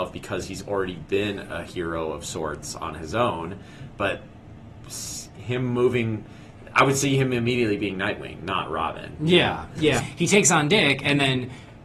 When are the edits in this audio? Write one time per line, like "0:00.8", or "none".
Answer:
0:10.0